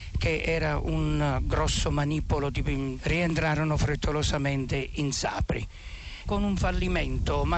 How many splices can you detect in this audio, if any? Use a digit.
2